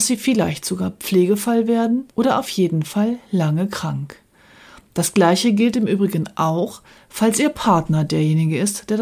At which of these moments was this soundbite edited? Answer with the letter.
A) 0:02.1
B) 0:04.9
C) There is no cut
A